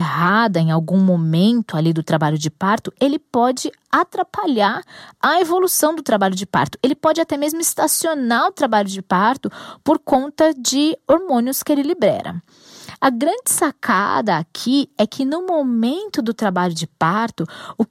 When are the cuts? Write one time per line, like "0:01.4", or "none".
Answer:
none